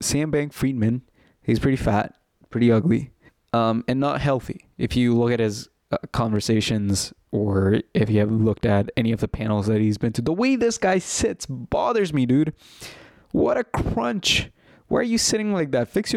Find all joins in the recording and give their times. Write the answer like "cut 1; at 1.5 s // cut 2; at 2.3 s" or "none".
none